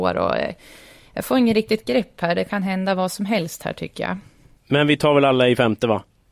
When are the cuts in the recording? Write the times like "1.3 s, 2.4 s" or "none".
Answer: none